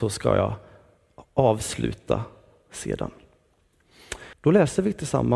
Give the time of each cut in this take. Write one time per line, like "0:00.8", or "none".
0:04.3